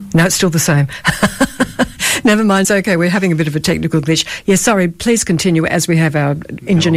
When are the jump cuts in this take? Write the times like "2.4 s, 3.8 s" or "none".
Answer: none